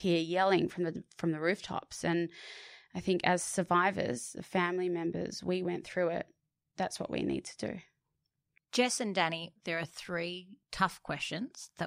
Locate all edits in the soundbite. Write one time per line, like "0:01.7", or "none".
0:09.6